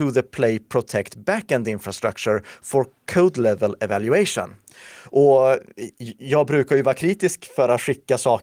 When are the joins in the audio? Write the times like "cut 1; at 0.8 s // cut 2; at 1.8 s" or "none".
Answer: cut 1; at 5.0 s

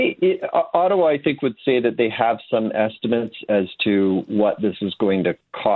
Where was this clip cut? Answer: none

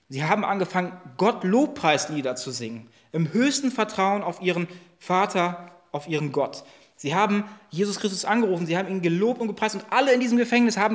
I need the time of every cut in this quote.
none

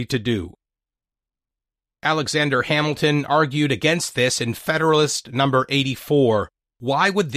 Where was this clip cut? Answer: none

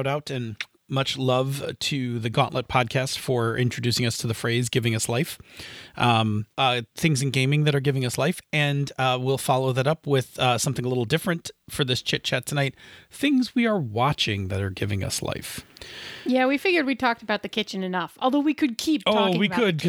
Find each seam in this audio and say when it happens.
cut 1; at 6.5 s

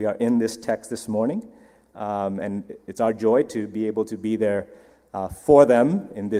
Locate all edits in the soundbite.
cut 1; at 1.9 s

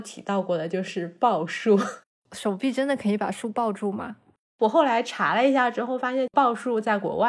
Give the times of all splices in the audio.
cut 1; at 4.5 s

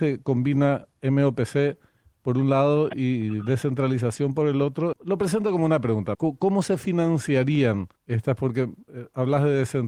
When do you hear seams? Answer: cut 1; at 4.9 s // cut 2; at 6.1 s // cut 3; at 8.0 s

